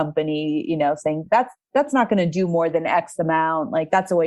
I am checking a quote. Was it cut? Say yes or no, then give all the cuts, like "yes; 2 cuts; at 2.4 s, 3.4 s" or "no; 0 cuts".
no; 0 cuts